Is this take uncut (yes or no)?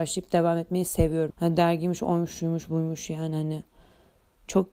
no